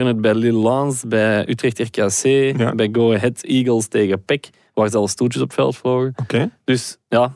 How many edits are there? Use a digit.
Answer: 0